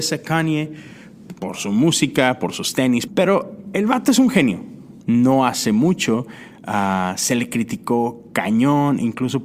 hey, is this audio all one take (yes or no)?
no